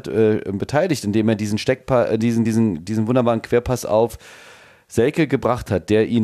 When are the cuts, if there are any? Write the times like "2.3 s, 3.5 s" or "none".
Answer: none